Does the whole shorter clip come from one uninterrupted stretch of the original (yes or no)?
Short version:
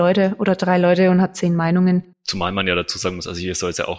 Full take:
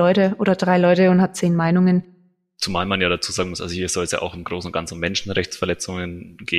no